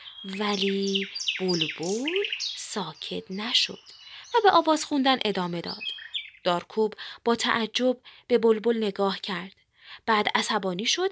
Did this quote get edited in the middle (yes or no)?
no